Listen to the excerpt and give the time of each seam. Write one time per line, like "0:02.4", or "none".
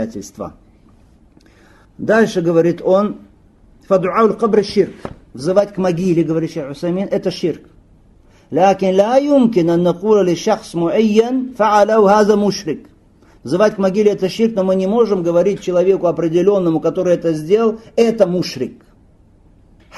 none